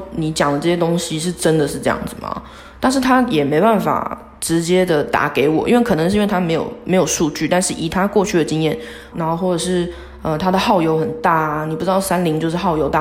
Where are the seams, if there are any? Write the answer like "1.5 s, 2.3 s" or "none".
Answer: 9.1 s